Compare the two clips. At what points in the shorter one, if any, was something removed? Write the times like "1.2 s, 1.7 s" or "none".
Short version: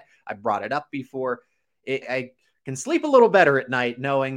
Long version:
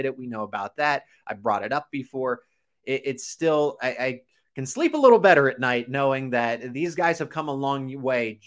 2.0 s